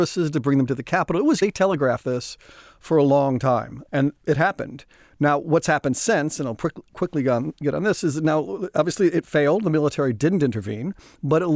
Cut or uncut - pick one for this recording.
uncut